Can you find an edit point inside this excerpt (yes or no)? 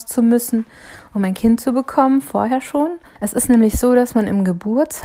yes